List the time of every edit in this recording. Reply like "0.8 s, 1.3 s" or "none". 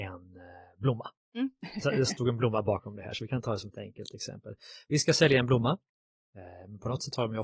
6.2 s